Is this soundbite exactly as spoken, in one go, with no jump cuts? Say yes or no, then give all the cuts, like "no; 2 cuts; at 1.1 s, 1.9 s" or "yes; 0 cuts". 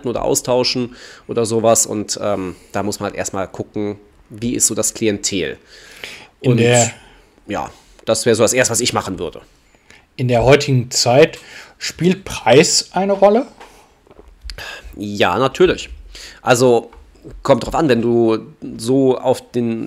yes; 0 cuts